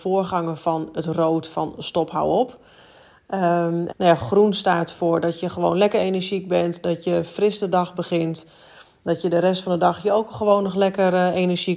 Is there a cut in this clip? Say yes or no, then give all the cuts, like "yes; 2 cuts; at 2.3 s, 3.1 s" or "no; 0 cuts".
yes; 1 cut; at 3.9 s